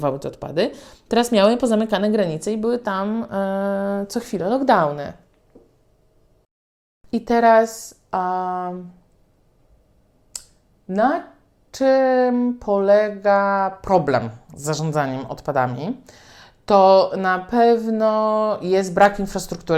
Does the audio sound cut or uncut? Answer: uncut